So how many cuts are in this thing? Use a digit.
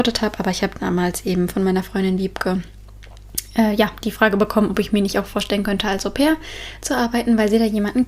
0